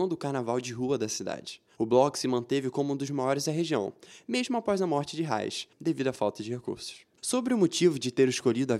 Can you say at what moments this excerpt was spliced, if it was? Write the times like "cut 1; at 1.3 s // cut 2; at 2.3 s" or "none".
cut 1; at 5.7 s // cut 2; at 7.1 s